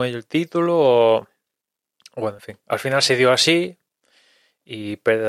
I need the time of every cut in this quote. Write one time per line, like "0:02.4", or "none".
none